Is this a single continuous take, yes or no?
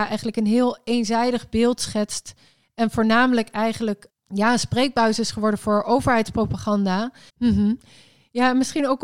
no